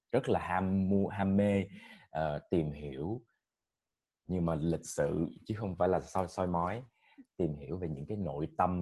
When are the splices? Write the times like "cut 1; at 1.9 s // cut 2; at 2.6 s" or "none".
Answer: none